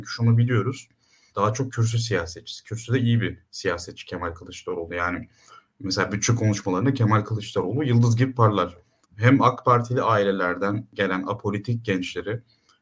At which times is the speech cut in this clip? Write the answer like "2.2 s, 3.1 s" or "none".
1.3 s, 9.0 s